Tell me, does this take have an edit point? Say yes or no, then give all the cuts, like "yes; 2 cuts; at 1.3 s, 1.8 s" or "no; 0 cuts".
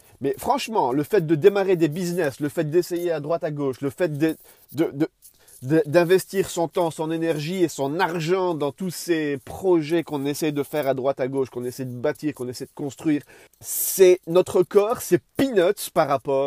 yes; 1 cut; at 13.5 s